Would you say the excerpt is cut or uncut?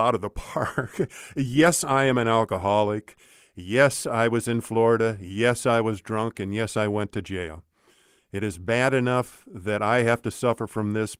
uncut